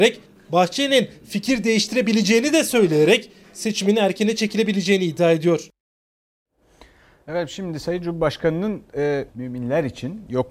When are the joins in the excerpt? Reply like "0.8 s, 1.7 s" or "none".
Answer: 9.3 s